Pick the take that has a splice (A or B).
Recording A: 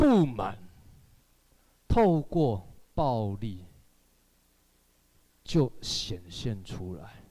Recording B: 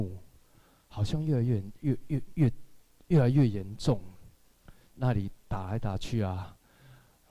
B